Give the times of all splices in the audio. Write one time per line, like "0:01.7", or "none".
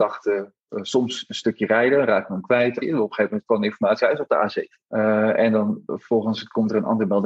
0:02.8
0:04.8

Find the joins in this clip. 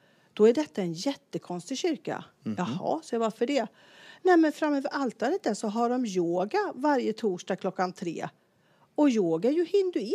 none

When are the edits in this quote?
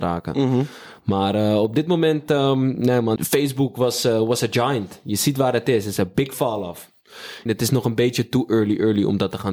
0:03.2
0:07.5

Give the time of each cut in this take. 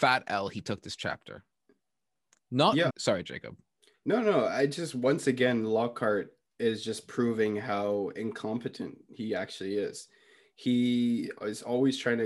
0:02.9

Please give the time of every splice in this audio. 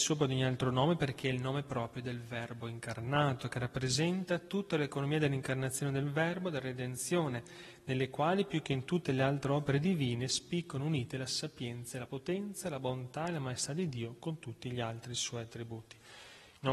none

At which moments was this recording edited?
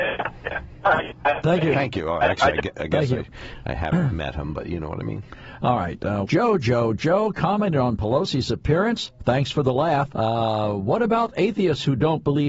0:06.2
0:10.1

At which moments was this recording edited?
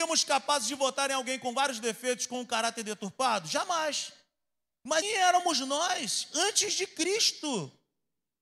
0:05.0

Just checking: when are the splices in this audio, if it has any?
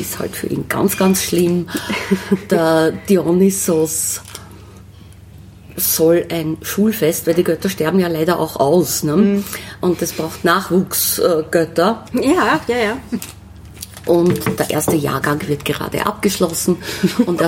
0:12.1
0:13.2
0:14.6

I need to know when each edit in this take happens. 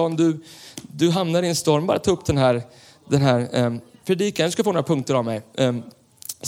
none

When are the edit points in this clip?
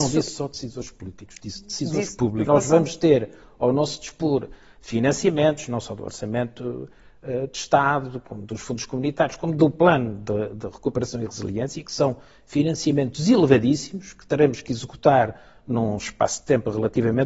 0:02.5

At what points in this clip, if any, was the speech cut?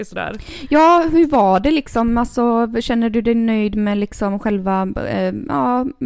none

